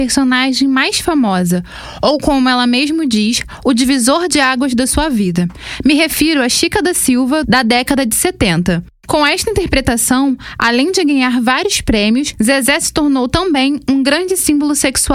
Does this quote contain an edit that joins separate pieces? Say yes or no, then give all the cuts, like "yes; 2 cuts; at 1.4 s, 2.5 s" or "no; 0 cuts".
yes; 1 cut; at 7.4 s